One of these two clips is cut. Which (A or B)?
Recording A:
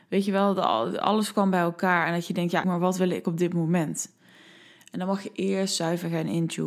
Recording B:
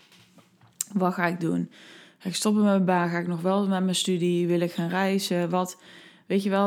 A